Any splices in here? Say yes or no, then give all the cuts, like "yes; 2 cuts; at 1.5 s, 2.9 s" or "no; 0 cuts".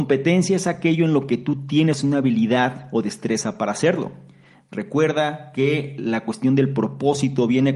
no; 0 cuts